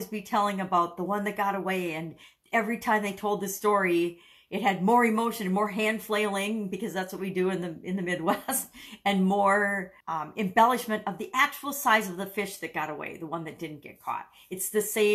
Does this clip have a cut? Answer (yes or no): yes